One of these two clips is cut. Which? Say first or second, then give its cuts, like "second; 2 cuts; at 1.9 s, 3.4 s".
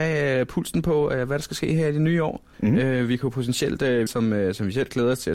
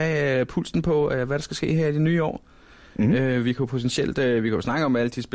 first; 2 cuts; at 2.5 s, 4.1 s